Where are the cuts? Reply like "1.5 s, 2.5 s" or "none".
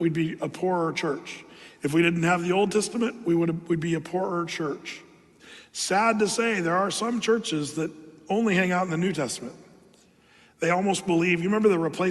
none